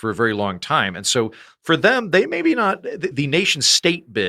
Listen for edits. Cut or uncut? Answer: cut